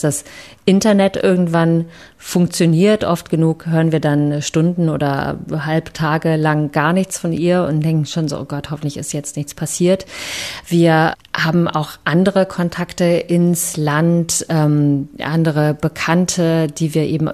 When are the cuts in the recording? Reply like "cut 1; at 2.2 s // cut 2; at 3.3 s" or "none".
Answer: none